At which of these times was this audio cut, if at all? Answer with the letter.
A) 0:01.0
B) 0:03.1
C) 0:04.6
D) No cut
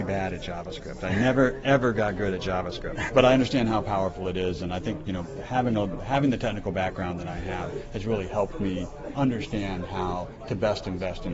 B